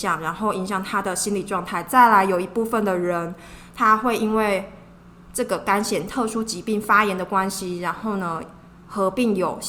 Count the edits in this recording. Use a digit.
0